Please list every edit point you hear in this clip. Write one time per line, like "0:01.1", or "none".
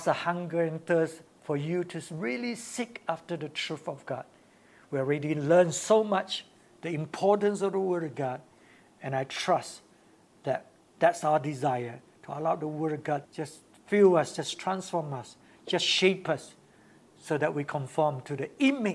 0:13.3